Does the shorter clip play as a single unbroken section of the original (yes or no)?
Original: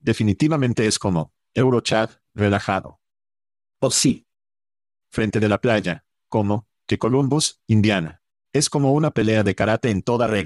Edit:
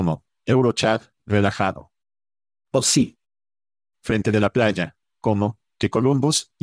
yes